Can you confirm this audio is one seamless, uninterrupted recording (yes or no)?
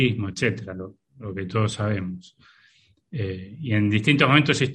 yes